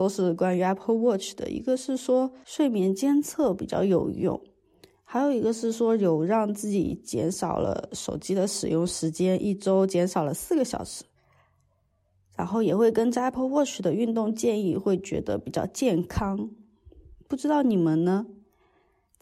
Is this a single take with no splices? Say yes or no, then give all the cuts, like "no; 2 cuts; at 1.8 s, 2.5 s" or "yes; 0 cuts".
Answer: yes; 0 cuts